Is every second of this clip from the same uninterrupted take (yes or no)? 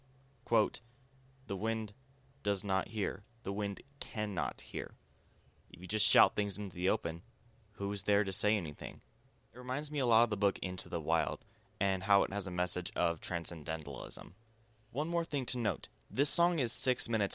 yes